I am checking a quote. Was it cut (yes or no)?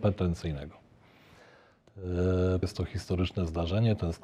yes